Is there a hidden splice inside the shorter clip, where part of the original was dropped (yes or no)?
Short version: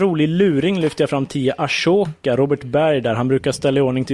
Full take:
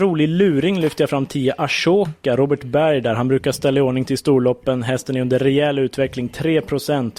no